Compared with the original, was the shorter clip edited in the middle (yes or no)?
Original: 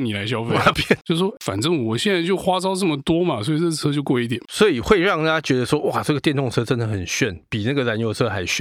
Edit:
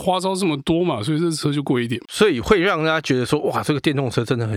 no